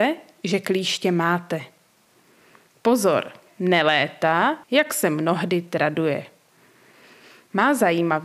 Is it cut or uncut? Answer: cut